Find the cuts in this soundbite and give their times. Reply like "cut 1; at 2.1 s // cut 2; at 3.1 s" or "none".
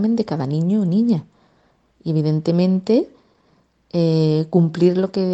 none